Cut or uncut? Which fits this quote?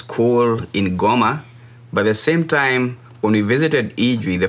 uncut